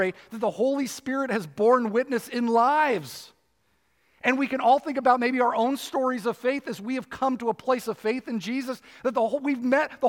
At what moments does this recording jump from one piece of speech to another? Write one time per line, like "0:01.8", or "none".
none